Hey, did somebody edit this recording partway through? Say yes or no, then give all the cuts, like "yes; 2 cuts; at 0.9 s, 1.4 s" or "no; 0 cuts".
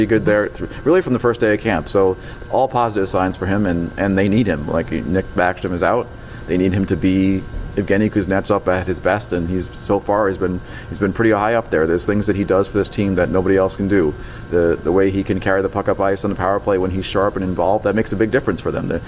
no; 0 cuts